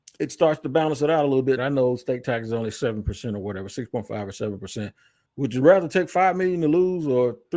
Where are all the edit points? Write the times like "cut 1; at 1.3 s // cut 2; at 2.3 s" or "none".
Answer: cut 1; at 1.6 s // cut 2; at 5.3 s